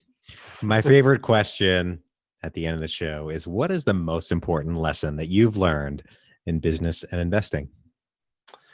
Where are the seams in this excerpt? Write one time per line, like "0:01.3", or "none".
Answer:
none